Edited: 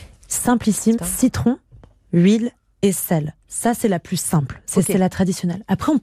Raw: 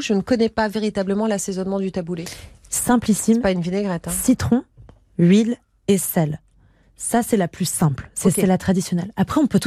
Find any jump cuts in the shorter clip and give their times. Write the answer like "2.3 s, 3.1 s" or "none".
1.0 s, 3.4 s